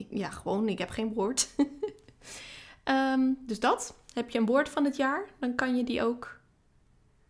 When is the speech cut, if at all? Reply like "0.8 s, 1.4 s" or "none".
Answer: none